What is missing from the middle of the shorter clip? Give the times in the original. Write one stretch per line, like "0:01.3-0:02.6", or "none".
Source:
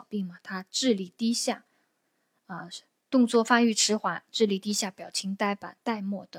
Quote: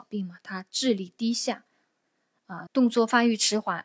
0:02.7-0:03.0